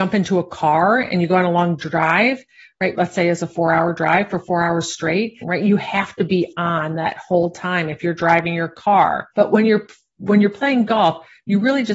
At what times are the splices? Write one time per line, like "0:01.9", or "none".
0:02.9
0:05.4
0:09.3